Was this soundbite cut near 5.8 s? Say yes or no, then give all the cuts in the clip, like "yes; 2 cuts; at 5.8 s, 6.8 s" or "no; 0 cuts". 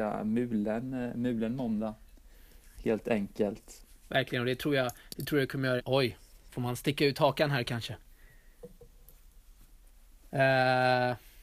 yes; 1 cut; at 5.8 s